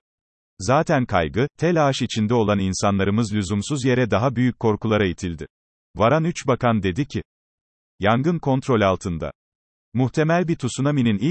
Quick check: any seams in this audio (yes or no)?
yes